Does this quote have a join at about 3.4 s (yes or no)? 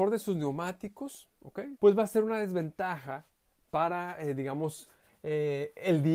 no